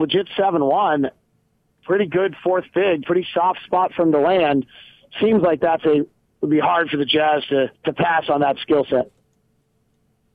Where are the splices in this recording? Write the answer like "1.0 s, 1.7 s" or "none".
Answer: 7.8 s

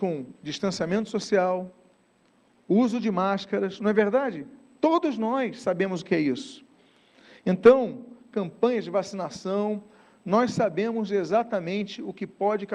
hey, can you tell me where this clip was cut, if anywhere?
none

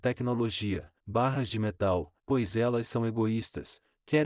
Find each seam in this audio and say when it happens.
1.0 s, 2.2 s

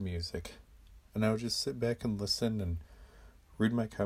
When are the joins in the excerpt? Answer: 1.1 s

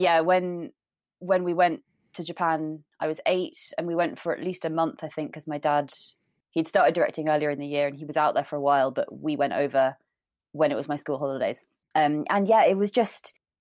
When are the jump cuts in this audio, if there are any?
none

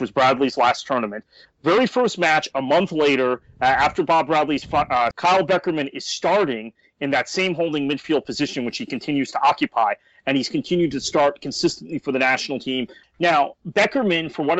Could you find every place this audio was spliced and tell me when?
5.1 s, 13.0 s

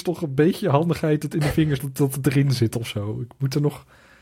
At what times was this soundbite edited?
1.8 s

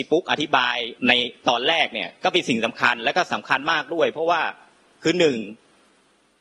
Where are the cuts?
1.0 s

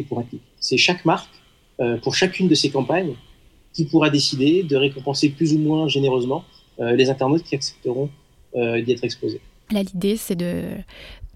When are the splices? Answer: 9.7 s

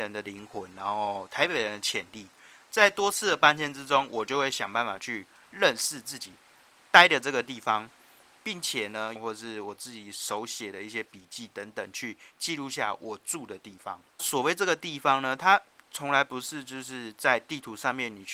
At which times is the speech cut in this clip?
9.2 s, 14.2 s

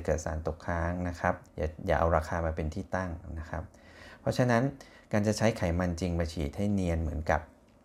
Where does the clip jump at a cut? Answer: 1.5 s

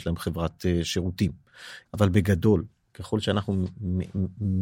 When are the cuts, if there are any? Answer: 1.8 s

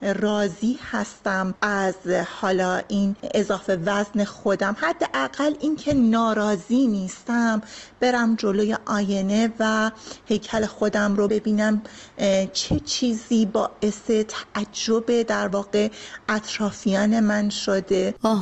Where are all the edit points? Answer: 11.3 s

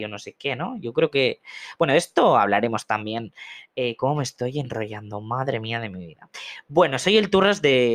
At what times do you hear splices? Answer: none

